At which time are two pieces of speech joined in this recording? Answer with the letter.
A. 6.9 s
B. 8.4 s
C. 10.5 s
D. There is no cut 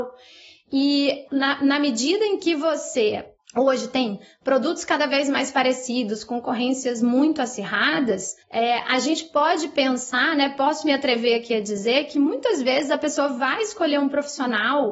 B